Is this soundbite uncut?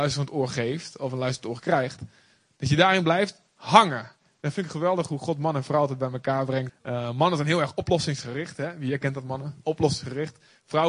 no; 1 cut; at 6.7 s

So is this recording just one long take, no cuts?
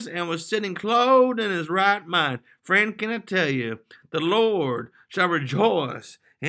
yes; 0 cuts

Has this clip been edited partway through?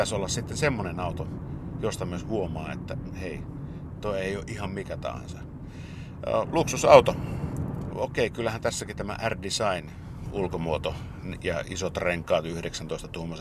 yes; 2 cuts; at 6.4 s, 7.9 s

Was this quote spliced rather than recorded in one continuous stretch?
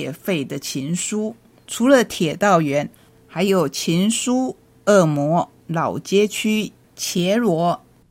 yes; 1 cut; at 1.6 s

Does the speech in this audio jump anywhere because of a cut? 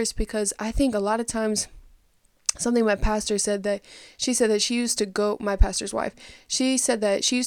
no; 0 cuts

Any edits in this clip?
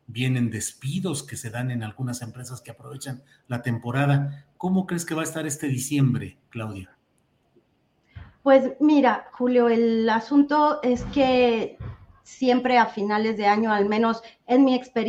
no; 0 cuts

